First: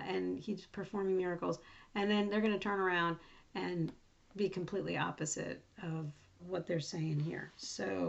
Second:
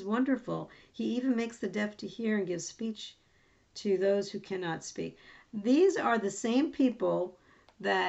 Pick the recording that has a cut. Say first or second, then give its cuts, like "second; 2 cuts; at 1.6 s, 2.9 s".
first; 1 cut; at 6.4 s